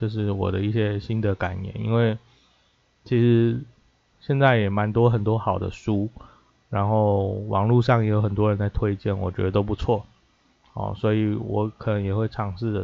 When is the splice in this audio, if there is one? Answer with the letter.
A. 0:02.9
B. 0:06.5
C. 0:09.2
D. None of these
D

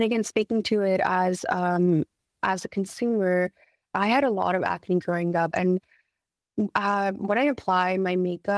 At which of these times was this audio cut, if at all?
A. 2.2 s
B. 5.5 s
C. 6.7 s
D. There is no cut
B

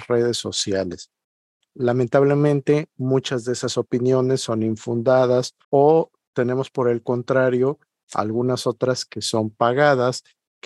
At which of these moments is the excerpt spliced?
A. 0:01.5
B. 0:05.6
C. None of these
B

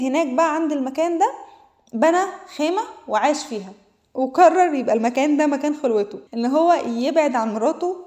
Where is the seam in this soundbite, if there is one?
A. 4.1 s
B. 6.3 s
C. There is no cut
B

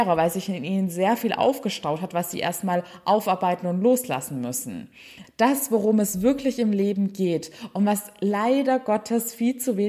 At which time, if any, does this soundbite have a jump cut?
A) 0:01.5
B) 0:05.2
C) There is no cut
B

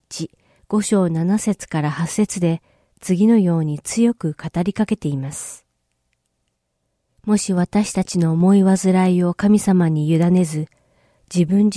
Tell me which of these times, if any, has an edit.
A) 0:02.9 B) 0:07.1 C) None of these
B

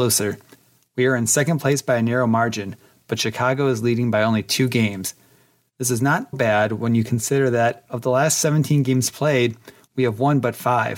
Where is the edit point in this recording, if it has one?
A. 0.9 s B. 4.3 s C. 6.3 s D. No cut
C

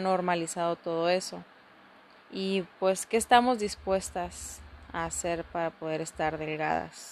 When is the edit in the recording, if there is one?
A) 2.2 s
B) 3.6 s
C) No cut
A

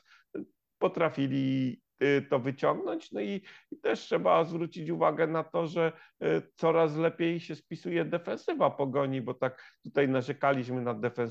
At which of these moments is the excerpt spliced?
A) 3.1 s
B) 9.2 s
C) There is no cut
C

